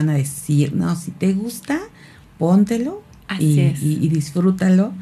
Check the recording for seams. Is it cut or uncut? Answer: uncut